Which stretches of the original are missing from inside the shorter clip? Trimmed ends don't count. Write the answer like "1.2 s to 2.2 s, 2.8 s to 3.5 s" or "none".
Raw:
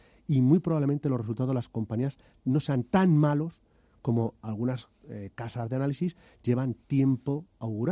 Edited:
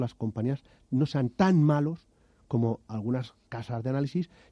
5.0 s to 5.3 s